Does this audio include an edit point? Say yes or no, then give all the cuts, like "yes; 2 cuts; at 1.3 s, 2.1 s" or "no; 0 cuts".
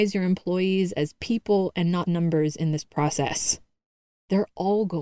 yes; 1 cut; at 2.0 s